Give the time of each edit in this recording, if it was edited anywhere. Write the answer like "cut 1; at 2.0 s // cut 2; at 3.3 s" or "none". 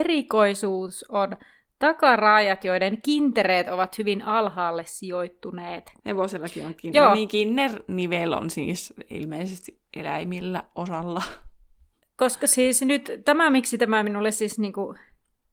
cut 1; at 6.0 s